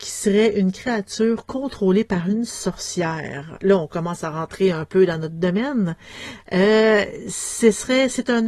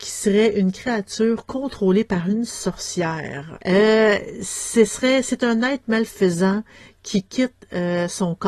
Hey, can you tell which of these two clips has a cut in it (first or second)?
second